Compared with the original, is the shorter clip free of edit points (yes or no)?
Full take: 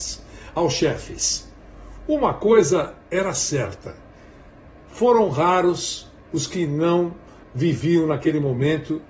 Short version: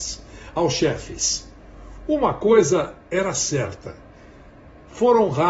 yes